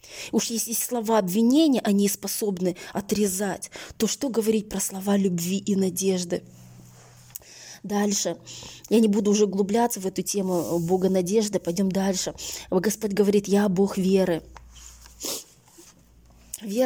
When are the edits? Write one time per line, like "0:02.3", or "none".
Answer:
none